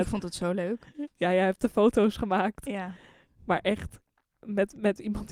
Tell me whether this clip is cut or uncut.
uncut